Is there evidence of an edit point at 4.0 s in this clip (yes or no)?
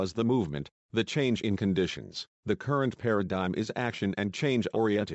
no